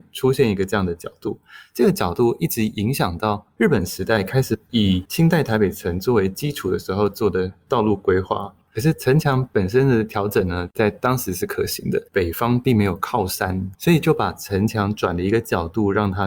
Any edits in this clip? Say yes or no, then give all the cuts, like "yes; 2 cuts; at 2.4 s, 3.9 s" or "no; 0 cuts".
yes; 3 cuts; at 8.7 s, 12.1 s, 13.7 s